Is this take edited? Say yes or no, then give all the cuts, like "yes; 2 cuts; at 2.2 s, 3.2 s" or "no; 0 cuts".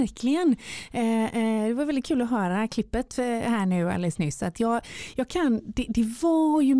no; 0 cuts